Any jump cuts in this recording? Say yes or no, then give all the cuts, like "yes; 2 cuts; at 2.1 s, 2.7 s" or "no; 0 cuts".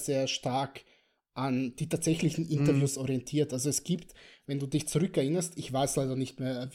no; 0 cuts